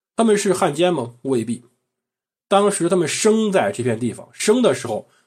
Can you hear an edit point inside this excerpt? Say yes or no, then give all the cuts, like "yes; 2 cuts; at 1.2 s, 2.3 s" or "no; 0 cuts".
no; 0 cuts